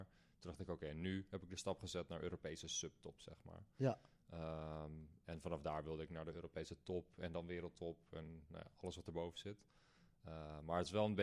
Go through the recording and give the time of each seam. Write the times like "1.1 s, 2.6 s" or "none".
none